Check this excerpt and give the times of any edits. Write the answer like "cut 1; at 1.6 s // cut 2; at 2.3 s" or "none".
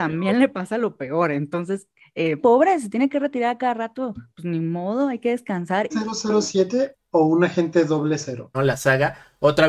cut 1; at 2.4 s // cut 2; at 5.9 s // cut 3; at 8.5 s